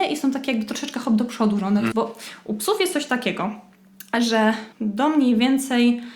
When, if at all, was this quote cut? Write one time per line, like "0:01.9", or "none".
0:01.9
0:04.7